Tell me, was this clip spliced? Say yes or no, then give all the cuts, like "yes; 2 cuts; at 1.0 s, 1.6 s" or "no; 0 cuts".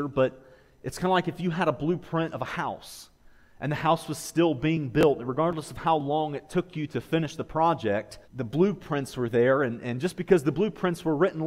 yes; 1 cut; at 8.2 s